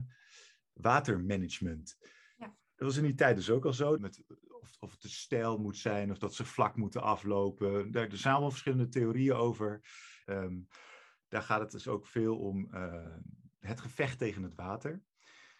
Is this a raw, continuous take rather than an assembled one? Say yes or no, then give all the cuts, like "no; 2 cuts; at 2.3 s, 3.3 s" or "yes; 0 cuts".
no; 2 cuts; at 4.0 s, 10.2 s